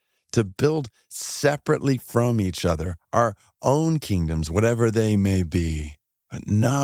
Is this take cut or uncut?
cut